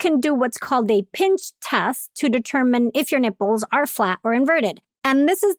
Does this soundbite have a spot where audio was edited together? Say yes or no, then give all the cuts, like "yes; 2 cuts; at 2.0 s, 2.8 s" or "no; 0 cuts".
no; 0 cuts